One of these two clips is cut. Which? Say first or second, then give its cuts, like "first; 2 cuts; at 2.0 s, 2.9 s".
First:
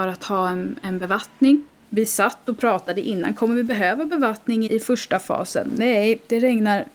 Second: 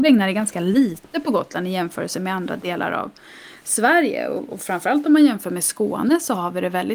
first; 1 cut; at 4.7 s